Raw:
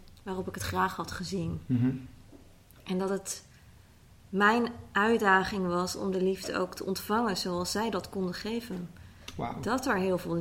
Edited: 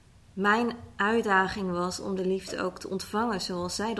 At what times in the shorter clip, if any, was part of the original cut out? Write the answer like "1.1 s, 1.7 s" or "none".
none